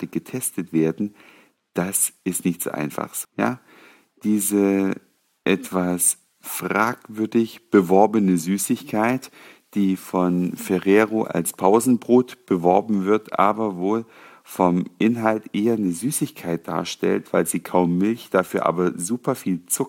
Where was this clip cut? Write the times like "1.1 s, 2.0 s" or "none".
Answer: 3.2 s